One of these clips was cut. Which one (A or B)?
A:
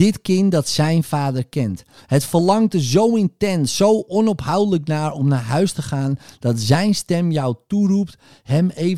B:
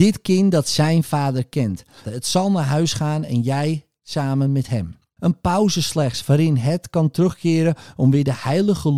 B